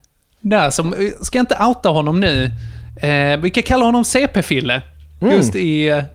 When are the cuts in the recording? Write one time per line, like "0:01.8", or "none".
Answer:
none